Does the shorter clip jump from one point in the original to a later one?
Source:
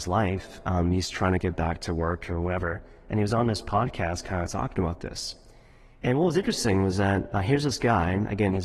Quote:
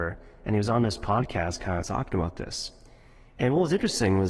no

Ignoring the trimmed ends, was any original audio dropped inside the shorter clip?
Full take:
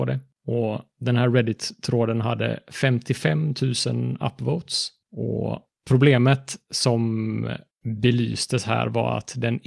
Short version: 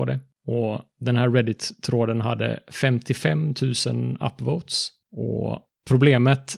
no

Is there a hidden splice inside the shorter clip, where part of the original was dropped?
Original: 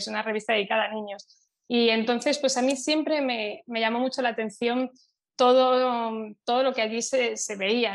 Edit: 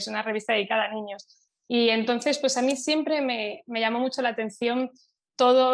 no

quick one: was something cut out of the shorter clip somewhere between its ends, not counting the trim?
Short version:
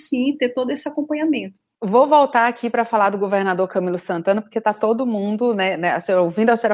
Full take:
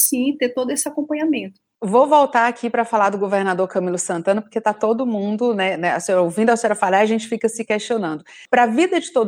no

